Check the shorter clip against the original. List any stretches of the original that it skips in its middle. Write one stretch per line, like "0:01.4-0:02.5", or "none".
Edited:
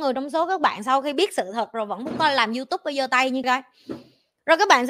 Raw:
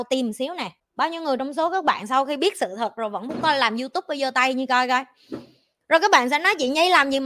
0:04.7-0:04.9